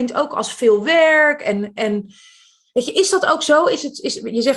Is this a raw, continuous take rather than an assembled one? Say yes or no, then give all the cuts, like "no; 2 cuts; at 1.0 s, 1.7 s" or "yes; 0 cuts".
yes; 0 cuts